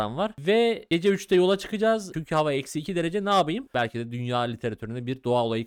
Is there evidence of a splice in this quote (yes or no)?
yes